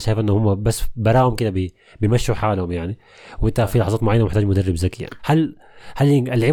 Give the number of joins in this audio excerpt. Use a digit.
1